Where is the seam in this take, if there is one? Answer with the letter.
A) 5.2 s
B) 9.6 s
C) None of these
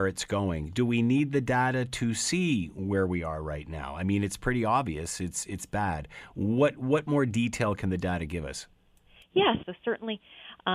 B